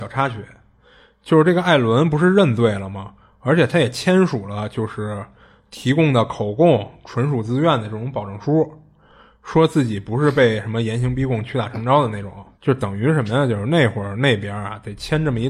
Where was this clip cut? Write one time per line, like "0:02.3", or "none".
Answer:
0:12.5